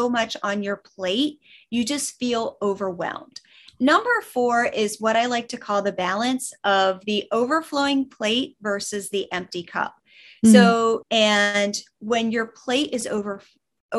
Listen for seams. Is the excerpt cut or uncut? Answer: cut